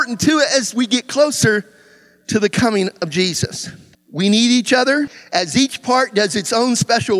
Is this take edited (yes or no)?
yes